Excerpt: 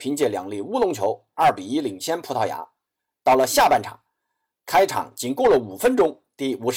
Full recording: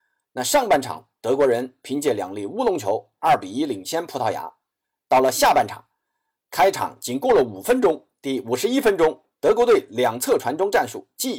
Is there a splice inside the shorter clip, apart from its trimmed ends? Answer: no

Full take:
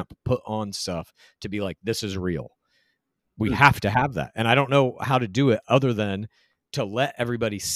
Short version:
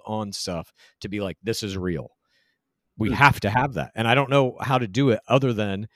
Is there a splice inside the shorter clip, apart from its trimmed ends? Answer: no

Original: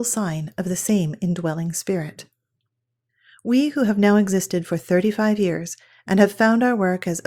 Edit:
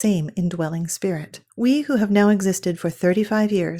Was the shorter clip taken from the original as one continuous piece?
no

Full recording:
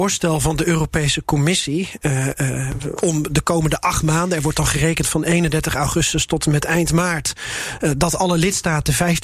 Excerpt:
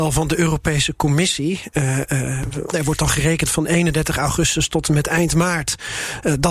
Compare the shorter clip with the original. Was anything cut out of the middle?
yes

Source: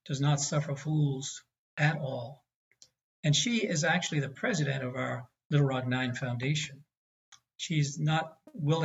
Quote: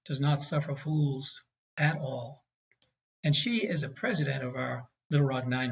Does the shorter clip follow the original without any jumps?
no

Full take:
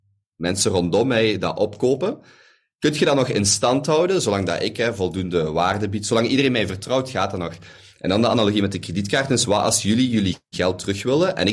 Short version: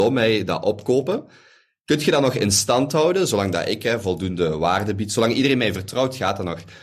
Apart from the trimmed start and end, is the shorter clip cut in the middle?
no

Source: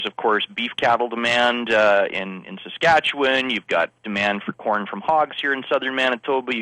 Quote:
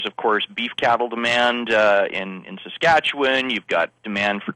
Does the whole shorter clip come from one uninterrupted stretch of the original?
yes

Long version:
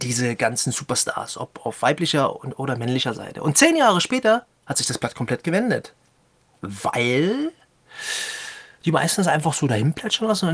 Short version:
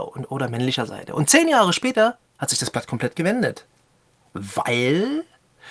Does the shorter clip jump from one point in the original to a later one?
no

